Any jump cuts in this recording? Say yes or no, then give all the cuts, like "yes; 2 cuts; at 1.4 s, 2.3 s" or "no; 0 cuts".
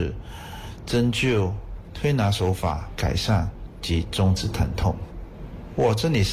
yes; 2 cuts; at 1.8 s, 3.0 s